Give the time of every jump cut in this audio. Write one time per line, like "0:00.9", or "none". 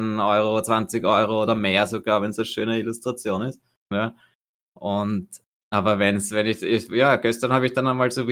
0:03.9